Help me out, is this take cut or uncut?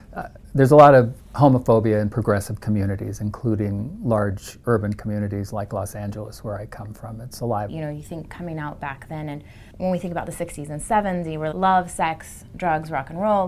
cut